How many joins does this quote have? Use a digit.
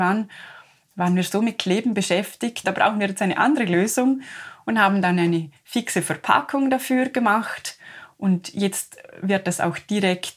1